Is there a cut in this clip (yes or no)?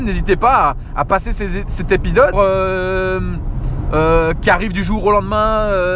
yes